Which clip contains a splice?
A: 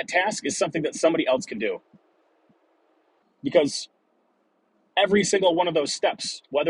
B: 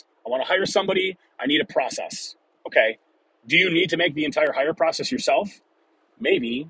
A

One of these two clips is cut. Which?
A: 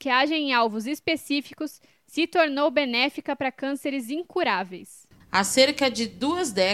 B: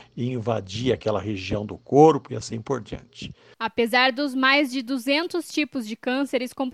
A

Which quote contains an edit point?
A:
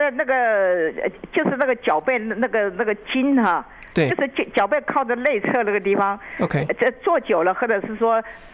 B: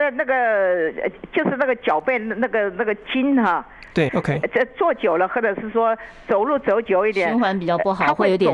B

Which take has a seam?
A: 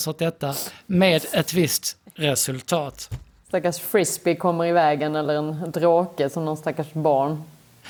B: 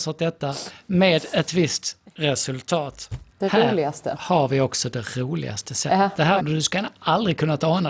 B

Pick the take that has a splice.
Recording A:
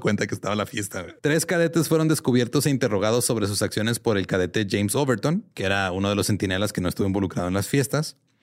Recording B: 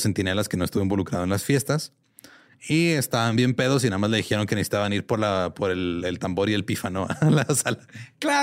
A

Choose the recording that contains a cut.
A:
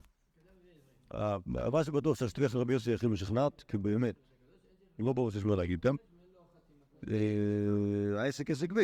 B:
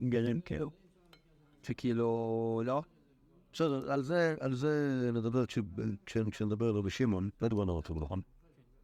B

